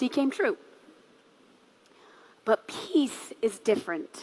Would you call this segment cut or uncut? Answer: uncut